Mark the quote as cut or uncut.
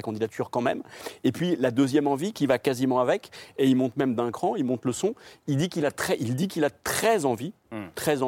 uncut